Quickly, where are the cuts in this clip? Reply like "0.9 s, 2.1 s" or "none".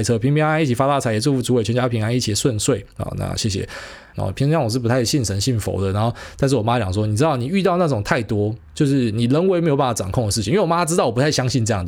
4.1 s, 8.7 s